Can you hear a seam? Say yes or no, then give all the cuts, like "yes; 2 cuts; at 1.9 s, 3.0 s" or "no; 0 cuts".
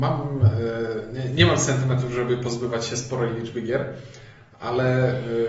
no; 0 cuts